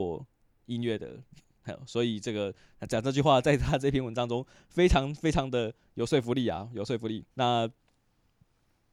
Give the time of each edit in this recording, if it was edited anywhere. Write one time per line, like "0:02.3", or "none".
0:07.3